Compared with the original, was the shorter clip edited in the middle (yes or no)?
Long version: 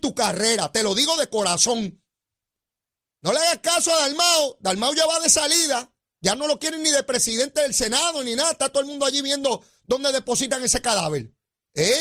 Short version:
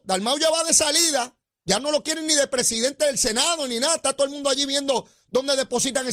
no